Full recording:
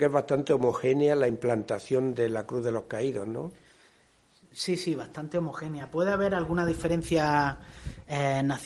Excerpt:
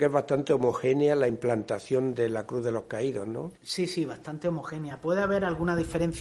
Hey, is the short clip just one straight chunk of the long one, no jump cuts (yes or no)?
no